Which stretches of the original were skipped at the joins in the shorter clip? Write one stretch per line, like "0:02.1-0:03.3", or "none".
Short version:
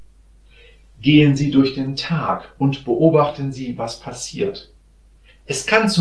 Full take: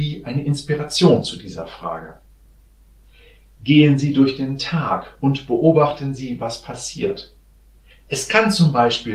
none